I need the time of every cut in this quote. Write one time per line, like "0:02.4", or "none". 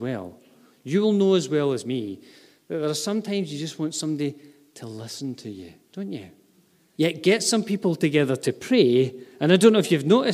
0:06.9